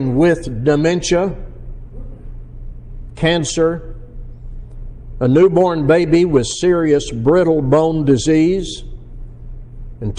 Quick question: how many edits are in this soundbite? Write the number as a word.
one